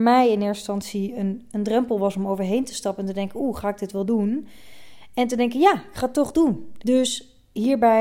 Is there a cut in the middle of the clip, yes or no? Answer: yes